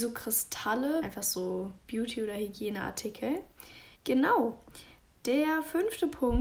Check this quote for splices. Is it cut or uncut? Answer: cut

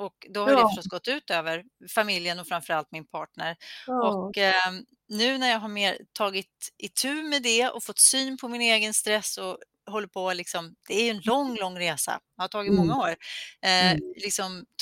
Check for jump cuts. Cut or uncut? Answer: uncut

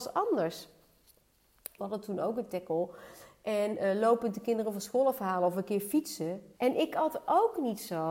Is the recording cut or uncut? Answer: cut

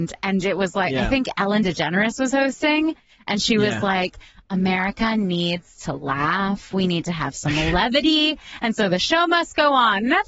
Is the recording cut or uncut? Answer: uncut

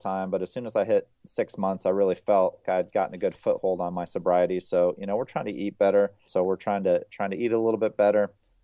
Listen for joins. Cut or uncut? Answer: cut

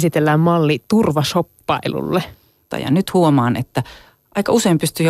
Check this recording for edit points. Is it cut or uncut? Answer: cut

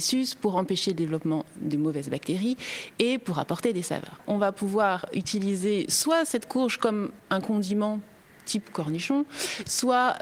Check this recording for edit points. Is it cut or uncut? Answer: uncut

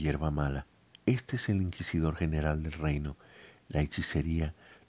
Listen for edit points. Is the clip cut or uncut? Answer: cut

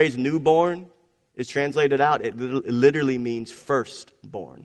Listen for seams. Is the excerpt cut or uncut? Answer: uncut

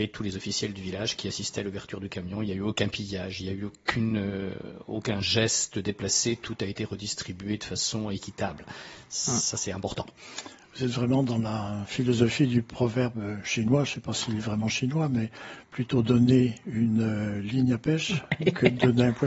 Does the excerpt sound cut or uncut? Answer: uncut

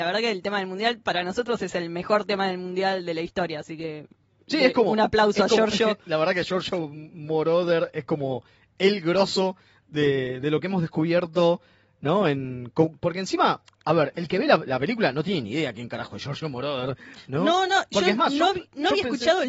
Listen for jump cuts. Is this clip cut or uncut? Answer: uncut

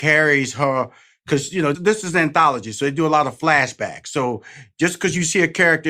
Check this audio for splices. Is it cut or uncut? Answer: cut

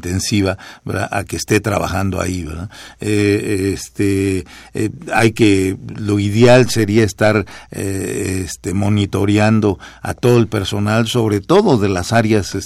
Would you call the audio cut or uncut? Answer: uncut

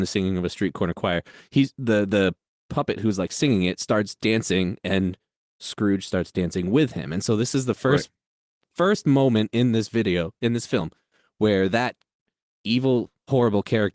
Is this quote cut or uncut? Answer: uncut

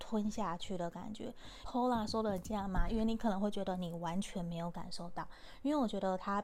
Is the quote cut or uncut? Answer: cut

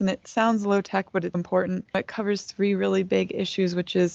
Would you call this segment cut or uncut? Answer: cut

